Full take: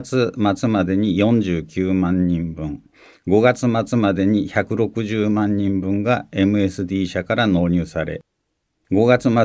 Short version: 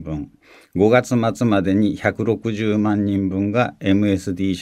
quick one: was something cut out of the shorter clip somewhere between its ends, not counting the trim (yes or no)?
no